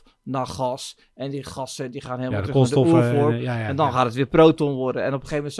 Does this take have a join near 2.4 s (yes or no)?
no